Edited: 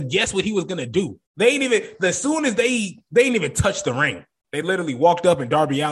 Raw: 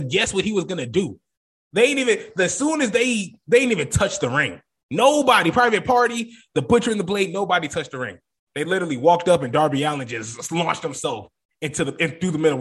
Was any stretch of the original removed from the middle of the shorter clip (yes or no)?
yes